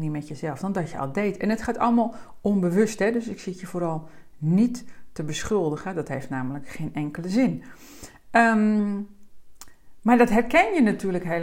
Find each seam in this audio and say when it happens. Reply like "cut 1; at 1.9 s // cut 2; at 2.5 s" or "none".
none